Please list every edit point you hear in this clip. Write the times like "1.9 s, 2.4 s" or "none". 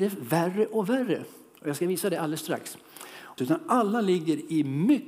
3.4 s